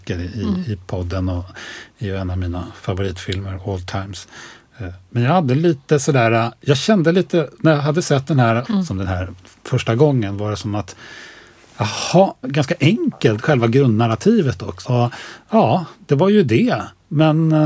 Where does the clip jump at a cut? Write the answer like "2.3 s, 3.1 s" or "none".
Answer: 8.6 s, 12.4 s, 14.8 s